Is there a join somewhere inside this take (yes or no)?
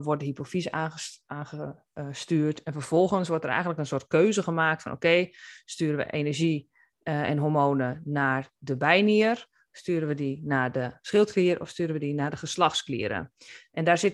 no